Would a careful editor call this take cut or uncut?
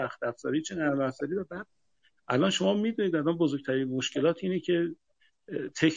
uncut